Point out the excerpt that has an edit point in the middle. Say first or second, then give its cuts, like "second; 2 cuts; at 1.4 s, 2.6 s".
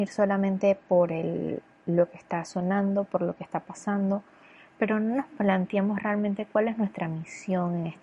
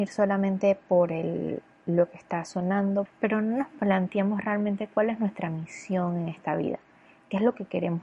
second; 1 cut; at 3.1 s